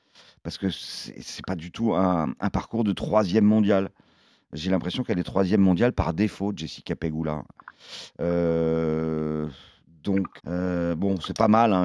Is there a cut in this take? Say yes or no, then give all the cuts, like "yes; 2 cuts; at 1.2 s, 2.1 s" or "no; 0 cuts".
yes; 1 cut; at 10.4 s